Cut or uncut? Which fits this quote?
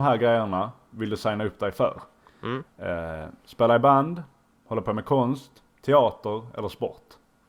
uncut